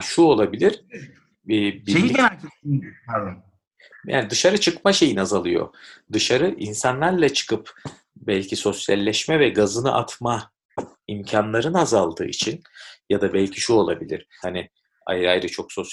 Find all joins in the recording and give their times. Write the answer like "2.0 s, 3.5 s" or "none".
14.4 s